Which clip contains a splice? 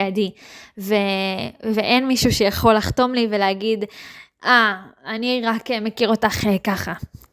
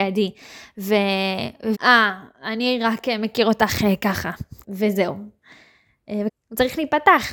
second; 3 cuts; at 1.7 s, 4.6 s, 6.3 s

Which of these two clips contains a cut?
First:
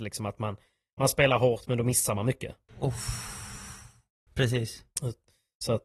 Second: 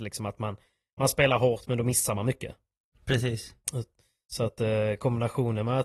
first; 2 cuts; at 2.7 s, 4.3 s

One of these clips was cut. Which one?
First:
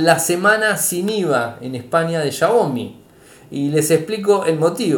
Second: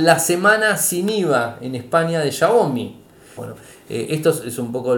second; 1 cut; at 3.4 s

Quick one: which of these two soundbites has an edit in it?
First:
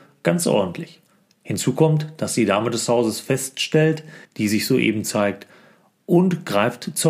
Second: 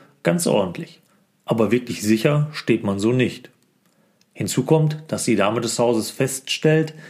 first; 2 cuts; at 1.3 s, 4.2 s

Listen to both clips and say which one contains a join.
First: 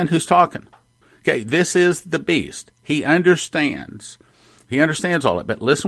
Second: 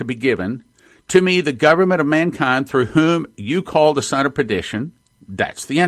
first; 1 cut; at 4.6 s

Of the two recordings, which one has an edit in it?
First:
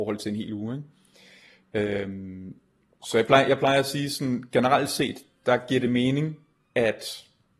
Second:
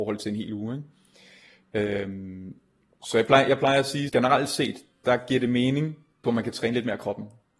second; 2 cuts; at 4.1 s, 6.2 s

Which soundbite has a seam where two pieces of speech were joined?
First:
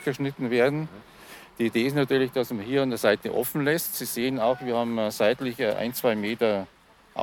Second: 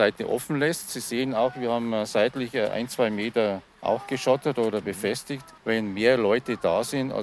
second; 2 cuts; at 3.7 s, 5.6 s

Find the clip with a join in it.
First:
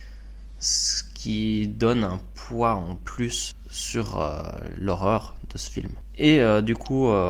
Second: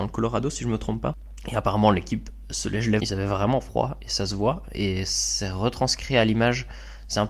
second; 1 cut; at 3.0 s

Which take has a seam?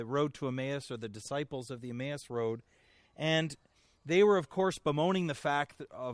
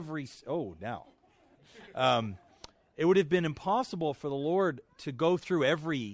second; 1 cut; at 1.6 s

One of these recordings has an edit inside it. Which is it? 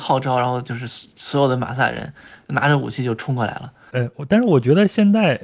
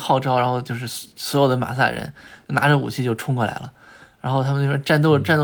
first; 1 cut; at 3.9 s

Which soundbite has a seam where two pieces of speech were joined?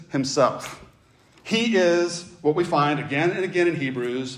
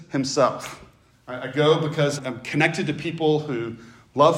second; 2 cuts; at 1.1 s, 2.2 s

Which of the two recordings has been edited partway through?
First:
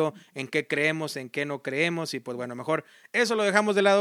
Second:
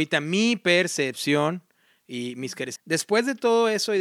second; 1 cut; at 2.8 s

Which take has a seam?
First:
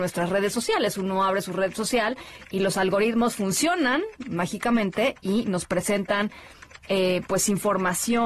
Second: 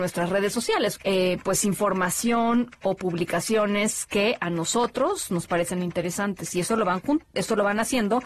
second; 1 cut; at 0.9 s

